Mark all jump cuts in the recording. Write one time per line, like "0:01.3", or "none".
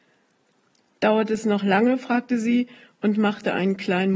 none